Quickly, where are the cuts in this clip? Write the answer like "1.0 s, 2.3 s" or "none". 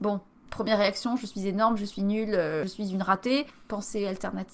none